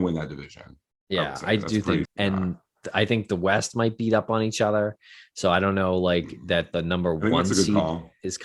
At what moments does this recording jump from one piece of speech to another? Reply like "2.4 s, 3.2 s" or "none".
2.1 s